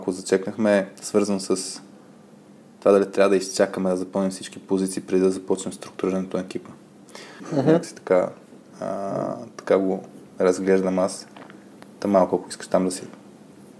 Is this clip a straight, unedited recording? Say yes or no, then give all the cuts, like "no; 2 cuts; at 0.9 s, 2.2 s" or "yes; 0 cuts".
no; 1 cut; at 7.4 s